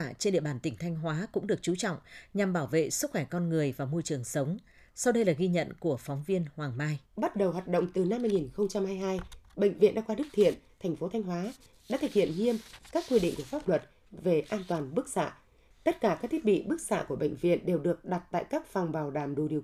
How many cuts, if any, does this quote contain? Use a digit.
1